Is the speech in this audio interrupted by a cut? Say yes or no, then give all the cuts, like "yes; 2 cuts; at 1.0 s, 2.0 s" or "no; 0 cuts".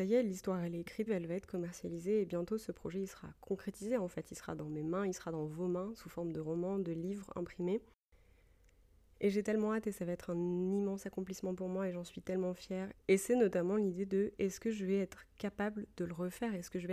yes; 2 cuts; at 1.1 s, 12.9 s